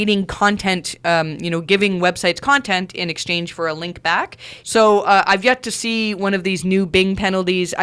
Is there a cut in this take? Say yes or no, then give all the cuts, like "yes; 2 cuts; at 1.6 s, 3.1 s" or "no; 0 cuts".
yes; 1 cut; at 4.6 s